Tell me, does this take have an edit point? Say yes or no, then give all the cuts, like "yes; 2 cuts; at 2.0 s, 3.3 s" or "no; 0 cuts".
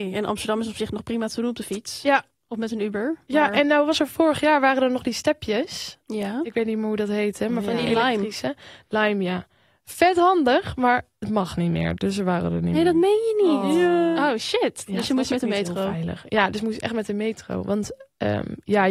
no; 0 cuts